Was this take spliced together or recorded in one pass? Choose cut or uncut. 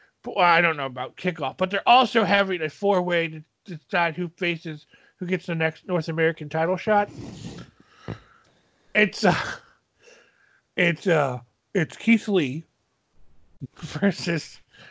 cut